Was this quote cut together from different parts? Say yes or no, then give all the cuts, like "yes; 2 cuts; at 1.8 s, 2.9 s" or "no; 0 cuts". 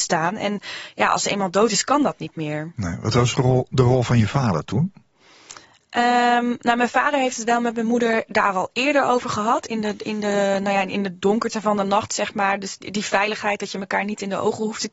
no; 0 cuts